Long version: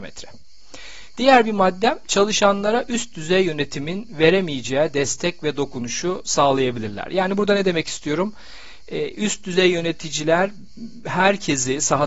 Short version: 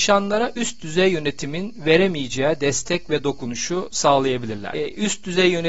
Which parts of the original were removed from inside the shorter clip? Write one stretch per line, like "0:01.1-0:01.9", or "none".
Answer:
0:07.1-0:08.9